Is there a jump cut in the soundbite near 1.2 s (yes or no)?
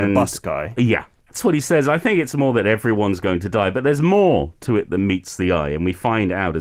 yes